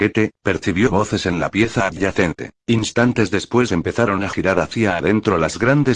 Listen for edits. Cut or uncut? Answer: cut